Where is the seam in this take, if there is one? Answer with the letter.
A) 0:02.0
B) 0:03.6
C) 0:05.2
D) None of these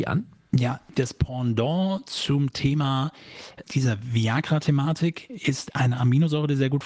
B